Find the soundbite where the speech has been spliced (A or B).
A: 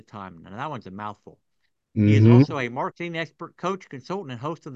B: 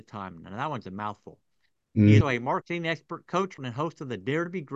B